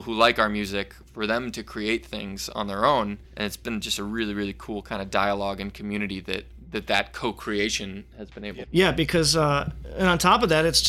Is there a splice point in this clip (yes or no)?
yes